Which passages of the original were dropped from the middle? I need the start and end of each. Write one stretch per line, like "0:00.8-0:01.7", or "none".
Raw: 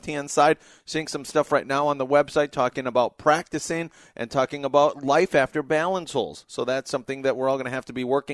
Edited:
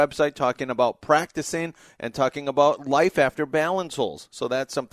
none